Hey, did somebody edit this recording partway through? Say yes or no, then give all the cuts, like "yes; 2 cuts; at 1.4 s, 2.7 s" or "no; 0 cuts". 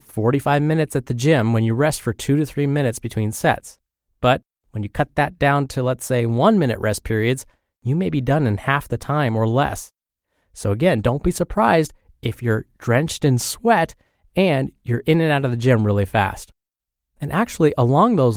no; 0 cuts